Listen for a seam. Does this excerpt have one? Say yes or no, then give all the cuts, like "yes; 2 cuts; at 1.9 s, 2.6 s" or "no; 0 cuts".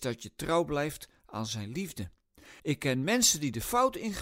yes; 1 cut; at 2.6 s